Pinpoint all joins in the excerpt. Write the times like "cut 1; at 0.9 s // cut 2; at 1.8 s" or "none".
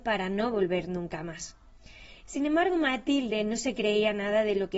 none

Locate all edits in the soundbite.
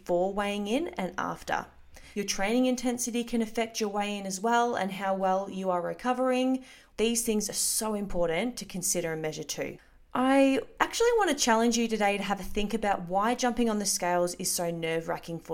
cut 1; at 2.1 s // cut 2; at 6.9 s

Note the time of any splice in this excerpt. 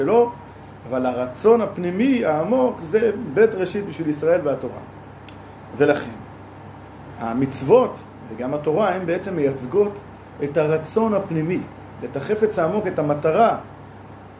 none

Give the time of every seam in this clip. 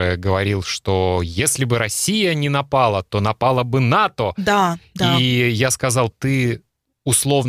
cut 1; at 6.1 s

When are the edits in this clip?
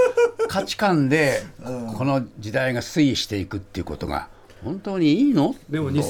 none

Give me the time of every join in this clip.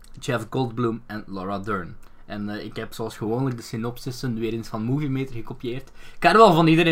none

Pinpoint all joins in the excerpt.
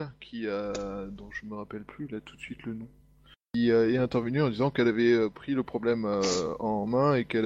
none

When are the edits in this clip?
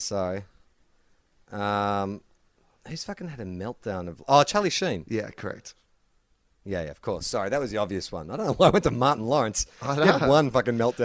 none

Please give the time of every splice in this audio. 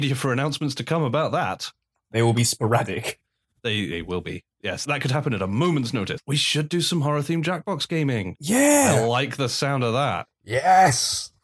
cut 1; at 4.8 s // cut 2; at 6.2 s

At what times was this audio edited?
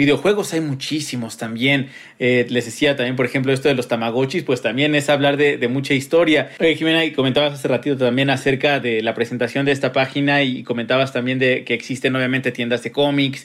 none

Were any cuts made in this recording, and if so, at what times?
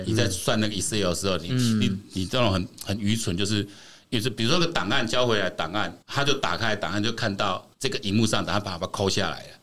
cut 1; at 6.0 s // cut 2; at 7.7 s

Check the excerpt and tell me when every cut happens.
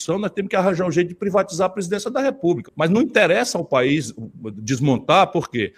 cut 1; at 2.6 s

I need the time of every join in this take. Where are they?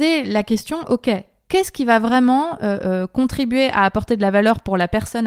none

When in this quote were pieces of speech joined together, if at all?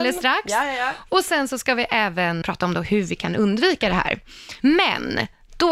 cut 1; at 2.4 s // cut 2; at 4.6 s

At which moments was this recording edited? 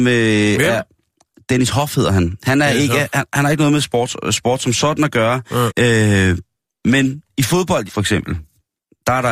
cut 1; at 5.7 s // cut 2; at 7.9 s

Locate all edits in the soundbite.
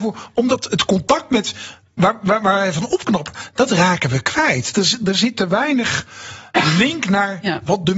none

